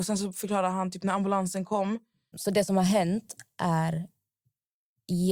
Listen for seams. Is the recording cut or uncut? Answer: cut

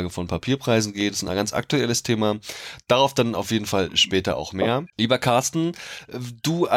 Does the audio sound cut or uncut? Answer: cut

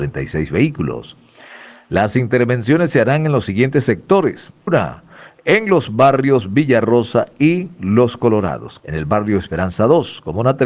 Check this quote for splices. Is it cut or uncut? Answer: cut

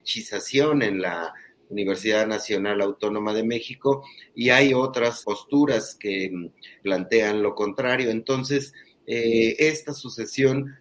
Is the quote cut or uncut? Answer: cut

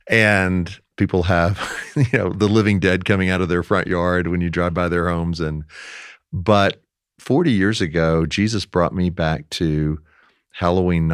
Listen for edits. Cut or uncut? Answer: uncut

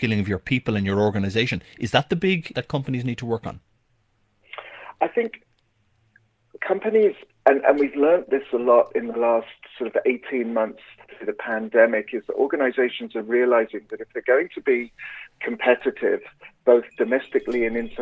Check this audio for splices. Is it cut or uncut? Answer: cut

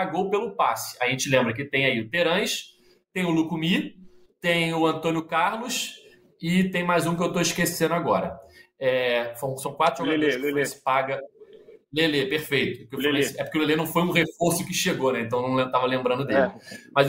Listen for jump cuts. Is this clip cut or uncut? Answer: uncut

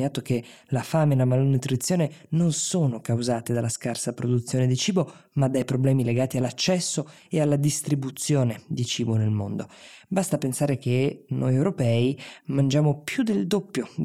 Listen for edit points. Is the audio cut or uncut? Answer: uncut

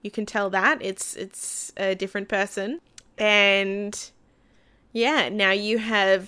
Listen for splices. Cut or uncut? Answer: uncut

